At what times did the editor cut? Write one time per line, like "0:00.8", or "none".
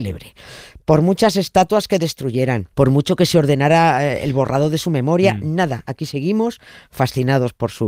0:02.7